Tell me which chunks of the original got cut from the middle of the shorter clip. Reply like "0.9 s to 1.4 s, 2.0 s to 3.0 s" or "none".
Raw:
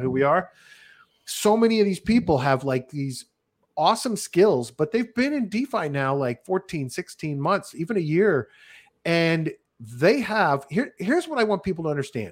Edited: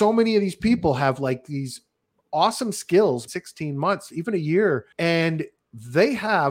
4.7 s to 6.9 s, 8.5 s to 9.0 s